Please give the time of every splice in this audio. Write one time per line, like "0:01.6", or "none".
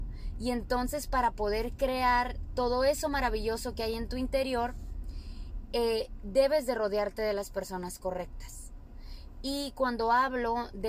none